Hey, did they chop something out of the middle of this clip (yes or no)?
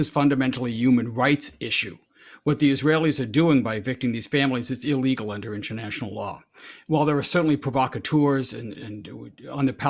yes